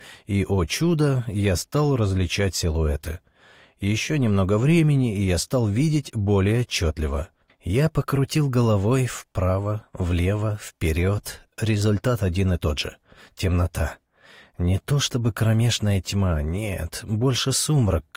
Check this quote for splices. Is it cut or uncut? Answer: cut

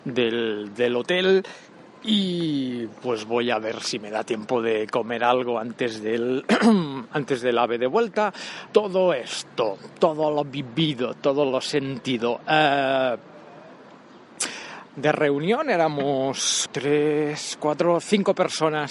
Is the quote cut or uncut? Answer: cut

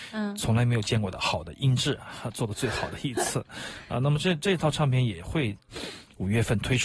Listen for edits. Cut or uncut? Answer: cut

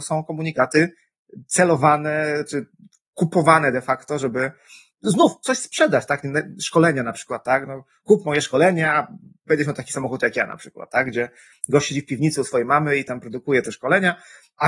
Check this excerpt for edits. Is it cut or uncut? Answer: uncut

